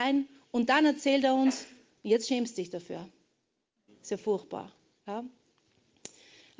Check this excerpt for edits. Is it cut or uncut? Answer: cut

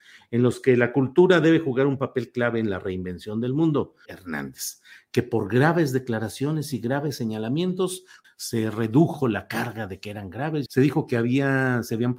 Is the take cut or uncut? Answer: cut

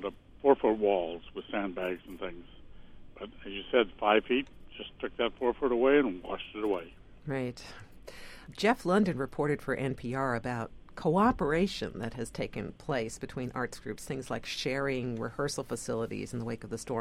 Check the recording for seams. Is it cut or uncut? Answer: uncut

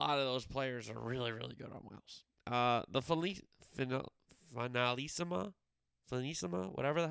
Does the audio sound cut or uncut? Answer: cut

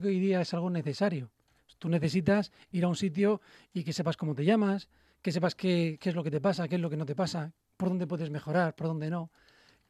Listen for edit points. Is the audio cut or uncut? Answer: uncut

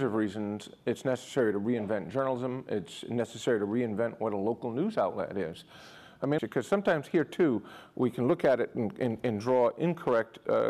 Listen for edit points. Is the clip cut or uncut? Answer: cut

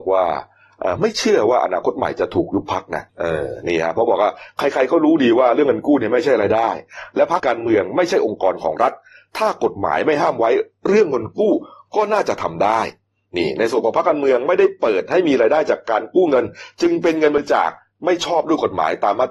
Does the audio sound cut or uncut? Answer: cut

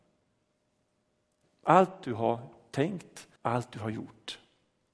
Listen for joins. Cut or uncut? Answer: cut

